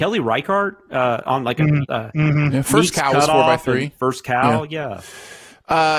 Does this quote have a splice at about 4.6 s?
no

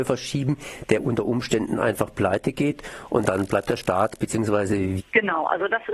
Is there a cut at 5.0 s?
yes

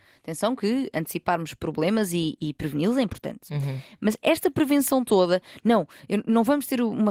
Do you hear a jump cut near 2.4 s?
yes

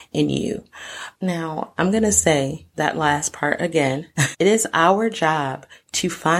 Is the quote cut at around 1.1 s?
yes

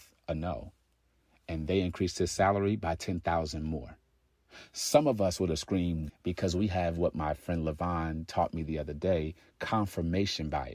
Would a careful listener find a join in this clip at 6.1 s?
yes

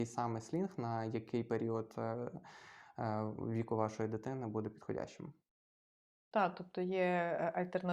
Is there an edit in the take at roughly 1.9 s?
no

